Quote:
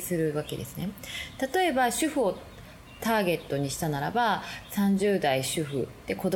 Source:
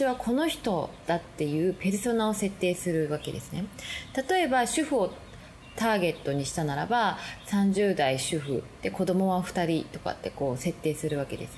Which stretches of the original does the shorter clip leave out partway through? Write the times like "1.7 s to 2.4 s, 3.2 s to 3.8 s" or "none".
none